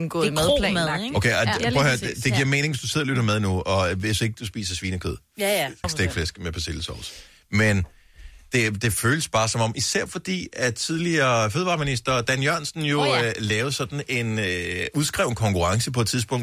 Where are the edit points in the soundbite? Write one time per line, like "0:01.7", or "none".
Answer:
0:05.8